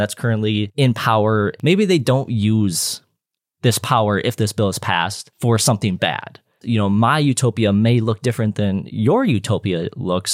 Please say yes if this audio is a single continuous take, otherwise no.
no